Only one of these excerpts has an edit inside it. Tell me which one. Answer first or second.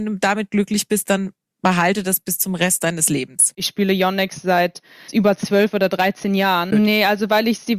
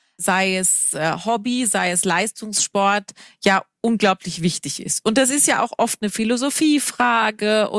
first